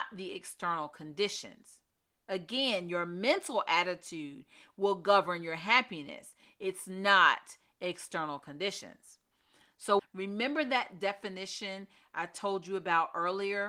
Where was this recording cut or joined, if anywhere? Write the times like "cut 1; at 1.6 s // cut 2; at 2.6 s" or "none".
cut 1; at 10.0 s